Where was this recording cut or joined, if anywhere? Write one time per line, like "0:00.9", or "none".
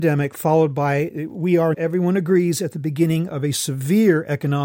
0:01.7